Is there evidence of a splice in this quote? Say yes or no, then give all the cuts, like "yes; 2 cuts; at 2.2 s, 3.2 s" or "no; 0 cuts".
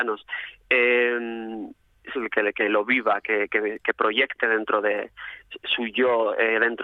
yes; 1 cut; at 2.2 s